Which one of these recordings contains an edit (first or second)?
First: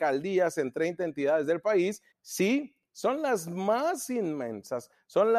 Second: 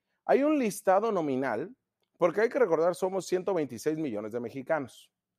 first